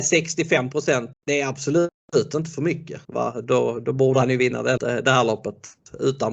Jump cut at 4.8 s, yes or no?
yes